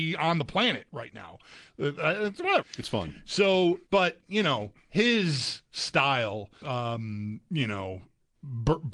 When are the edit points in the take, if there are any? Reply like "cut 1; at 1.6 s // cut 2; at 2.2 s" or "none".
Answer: cut 1; at 2.6 s // cut 2; at 3.9 s // cut 3; at 6.6 s